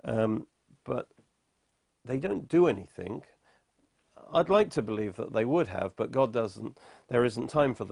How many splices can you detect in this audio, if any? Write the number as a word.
zero